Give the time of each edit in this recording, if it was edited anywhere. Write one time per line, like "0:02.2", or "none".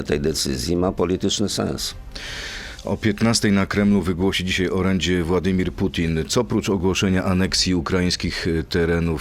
none

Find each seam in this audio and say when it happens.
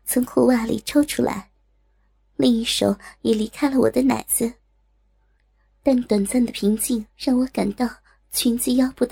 0:07.1

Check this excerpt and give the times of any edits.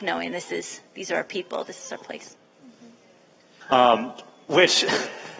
0:03.6

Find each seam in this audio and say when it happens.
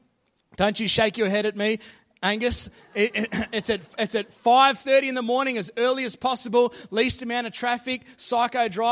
none

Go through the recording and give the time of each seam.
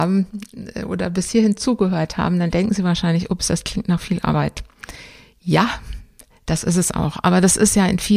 none

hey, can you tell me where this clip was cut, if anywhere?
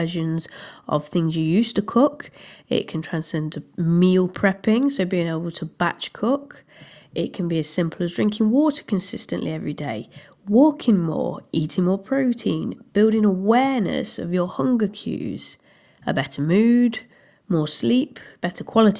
none

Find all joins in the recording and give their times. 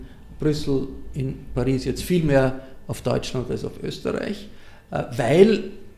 0:01.1

